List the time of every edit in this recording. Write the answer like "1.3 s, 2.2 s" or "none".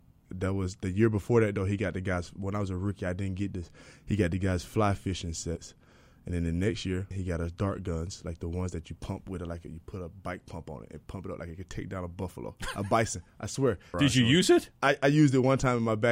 7.1 s, 13.9 s

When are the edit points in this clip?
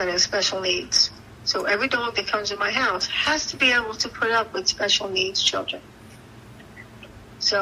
none

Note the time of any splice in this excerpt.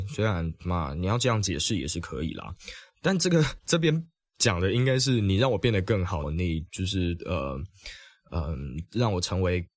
6.2 s

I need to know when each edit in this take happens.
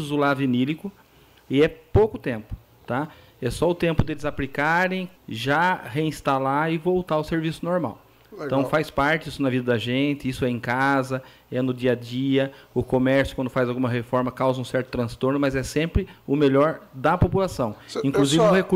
5.1 s

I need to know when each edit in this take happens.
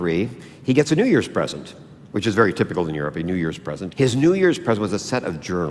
3.9 s

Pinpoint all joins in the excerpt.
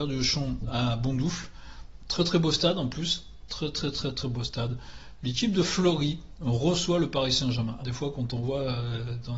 7.8 s

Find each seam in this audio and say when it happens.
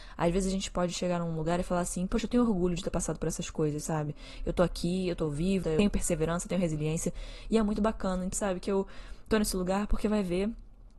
5.6 s, 8.3 s

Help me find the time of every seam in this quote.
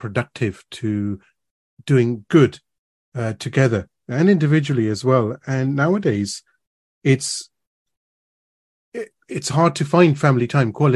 none

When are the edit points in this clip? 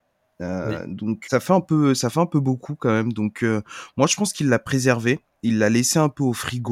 1.2 s

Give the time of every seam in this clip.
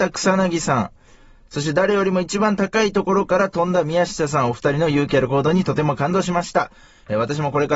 none

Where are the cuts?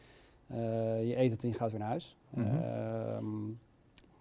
none

